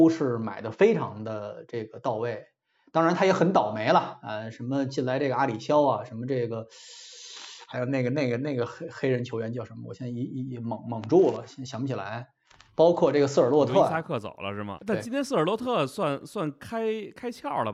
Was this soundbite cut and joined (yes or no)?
yes